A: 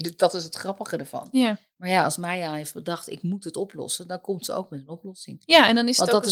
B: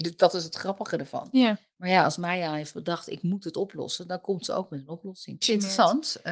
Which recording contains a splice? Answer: B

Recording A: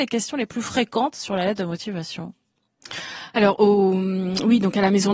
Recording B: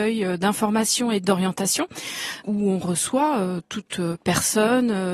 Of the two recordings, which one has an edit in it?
B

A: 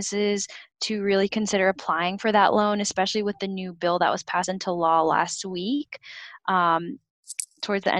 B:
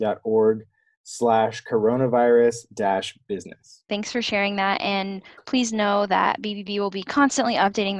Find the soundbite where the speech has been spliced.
B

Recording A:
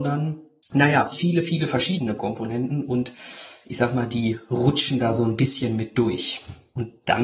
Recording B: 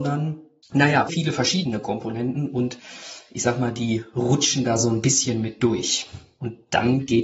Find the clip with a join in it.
B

